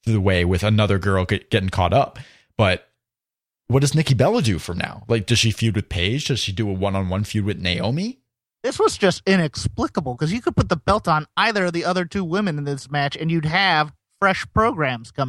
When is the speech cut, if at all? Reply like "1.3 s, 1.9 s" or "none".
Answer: none